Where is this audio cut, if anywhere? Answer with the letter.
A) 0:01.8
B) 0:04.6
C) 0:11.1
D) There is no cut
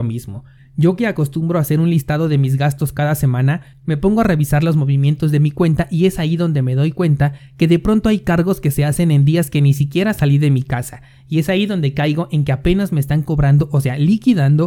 D